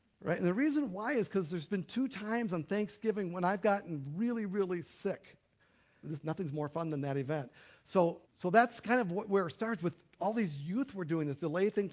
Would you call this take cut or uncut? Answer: cut